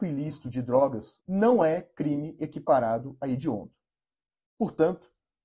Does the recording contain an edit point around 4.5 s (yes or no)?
no